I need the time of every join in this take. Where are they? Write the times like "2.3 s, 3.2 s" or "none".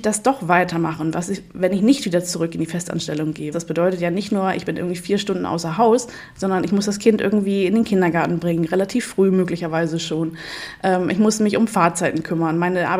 3.5 s